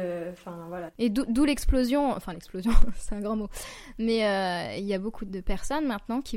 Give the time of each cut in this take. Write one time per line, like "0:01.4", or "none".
0:05.3

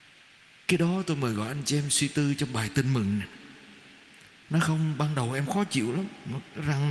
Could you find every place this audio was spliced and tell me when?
0:04.4

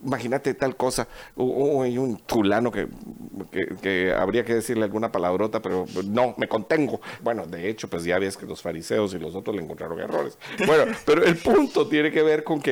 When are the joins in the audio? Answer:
0:07.2
0:10.6

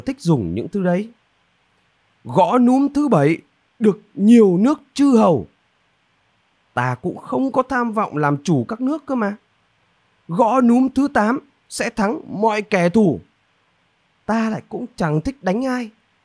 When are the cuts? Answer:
none

